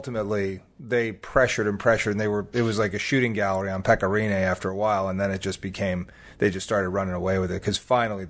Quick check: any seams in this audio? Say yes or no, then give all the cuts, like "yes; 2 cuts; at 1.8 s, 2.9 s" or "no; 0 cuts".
no; 0 cuts